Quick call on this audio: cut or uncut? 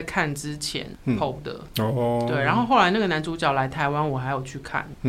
uncut